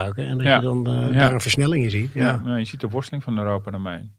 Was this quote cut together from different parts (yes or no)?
no